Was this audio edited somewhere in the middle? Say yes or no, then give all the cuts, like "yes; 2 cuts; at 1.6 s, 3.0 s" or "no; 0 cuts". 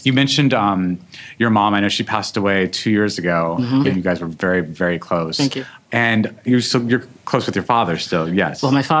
yes; 1 cut; at 3.8 s